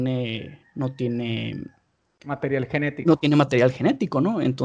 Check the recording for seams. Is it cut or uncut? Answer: uncut